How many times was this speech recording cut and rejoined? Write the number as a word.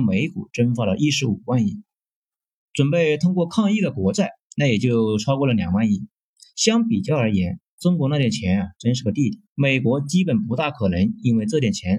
two